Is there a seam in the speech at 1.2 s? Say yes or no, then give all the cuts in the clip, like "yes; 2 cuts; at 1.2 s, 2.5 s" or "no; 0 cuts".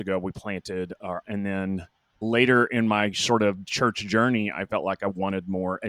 yes; 1 cut; at 1.2 s